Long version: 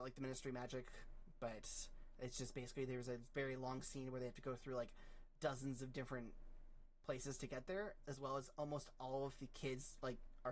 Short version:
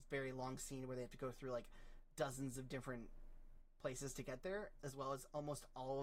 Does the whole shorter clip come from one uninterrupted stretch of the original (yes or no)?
yes